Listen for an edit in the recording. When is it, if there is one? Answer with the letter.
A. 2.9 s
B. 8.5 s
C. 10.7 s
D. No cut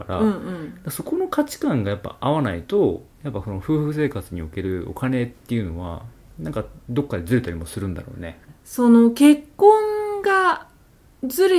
B